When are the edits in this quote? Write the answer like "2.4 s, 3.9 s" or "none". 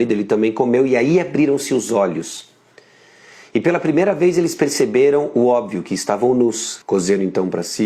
6.8 s